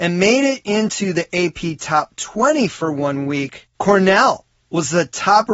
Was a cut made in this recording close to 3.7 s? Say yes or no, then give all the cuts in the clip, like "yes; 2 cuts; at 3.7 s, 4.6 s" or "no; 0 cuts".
yes; 1 cut; at 3.7 s